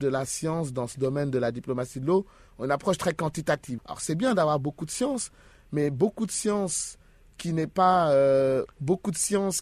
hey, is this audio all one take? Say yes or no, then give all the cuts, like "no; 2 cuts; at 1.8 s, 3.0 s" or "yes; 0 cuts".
no; 2 cuts; at 3.8 s, 8.7 s